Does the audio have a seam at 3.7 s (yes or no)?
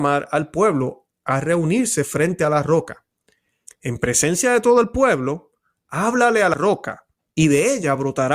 yes